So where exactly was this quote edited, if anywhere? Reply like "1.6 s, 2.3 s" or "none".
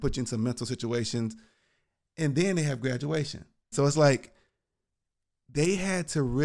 3.7 s